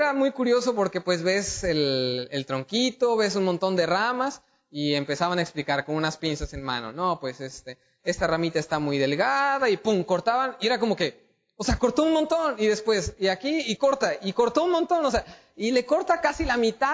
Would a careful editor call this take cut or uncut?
uncut